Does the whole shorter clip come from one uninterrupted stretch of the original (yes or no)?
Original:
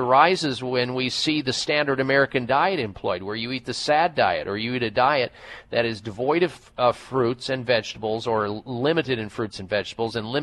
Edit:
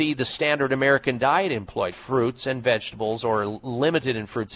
no